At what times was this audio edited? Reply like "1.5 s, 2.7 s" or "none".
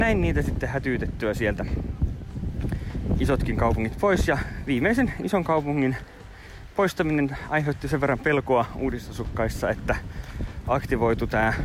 4.6 s